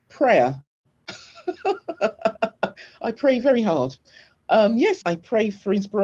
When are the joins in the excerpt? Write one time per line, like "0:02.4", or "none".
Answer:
0:05.0